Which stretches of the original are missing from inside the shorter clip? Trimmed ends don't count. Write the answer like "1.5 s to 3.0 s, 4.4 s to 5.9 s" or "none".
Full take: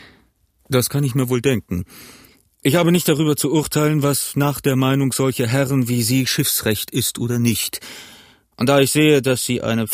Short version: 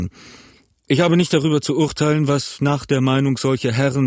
none